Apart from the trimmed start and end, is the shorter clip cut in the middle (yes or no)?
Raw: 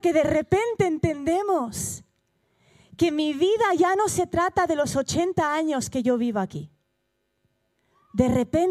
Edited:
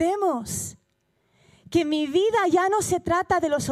no